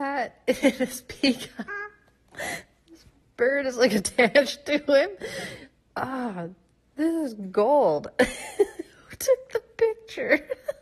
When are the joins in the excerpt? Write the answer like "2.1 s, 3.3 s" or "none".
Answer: 1.7 s